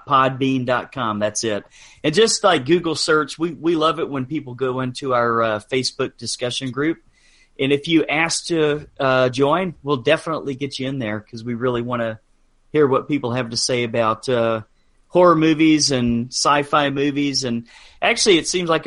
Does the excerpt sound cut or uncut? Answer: uncut